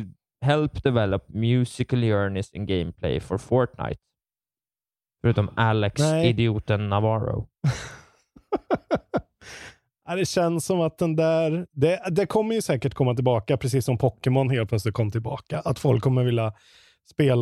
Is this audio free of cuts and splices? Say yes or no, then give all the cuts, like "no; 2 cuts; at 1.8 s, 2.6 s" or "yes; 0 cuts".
no; 1 cut; at 5.1 s